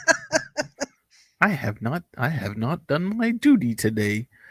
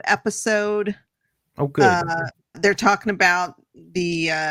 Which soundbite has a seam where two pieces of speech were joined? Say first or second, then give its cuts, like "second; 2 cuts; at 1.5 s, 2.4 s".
second; 1 cut; at 2.5 s